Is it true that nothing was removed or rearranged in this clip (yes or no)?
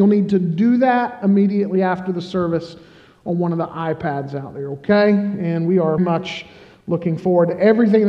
no